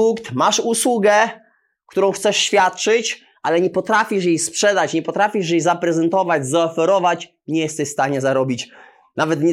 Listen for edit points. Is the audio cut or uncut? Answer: uncut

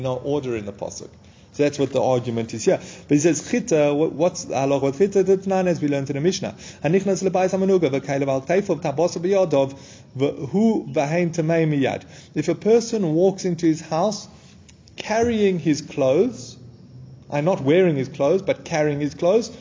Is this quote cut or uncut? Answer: cut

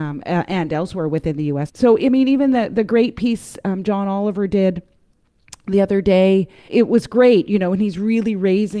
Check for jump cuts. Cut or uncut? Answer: cut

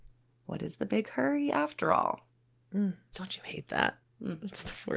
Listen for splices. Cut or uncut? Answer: cut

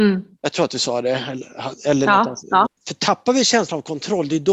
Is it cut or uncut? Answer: cut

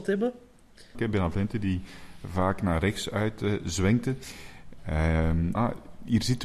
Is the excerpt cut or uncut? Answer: cut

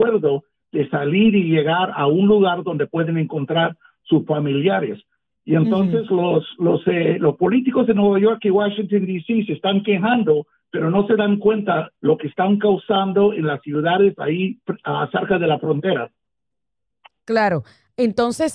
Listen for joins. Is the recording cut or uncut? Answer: uncut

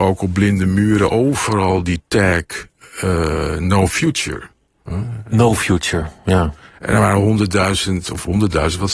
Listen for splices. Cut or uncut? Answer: uncut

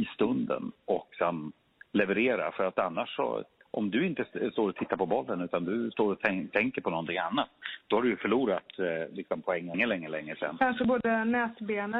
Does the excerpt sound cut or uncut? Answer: uncut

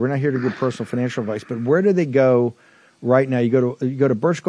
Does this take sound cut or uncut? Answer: uncut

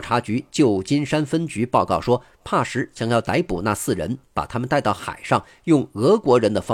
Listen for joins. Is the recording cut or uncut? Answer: uncut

